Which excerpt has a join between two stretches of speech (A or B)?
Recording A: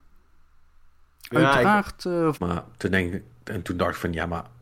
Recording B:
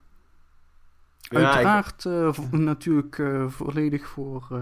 A